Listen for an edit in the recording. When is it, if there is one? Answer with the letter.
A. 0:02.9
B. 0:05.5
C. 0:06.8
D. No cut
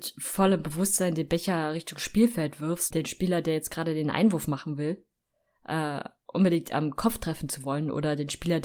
A